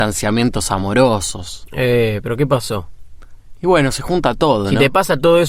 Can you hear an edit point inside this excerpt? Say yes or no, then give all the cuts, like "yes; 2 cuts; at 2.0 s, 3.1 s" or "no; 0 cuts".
no; 0 cuts